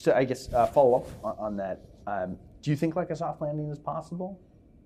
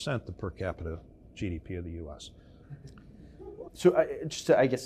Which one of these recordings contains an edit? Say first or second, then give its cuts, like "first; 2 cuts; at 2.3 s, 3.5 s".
second; 2 cuts; at 2.6 s, 3.7 s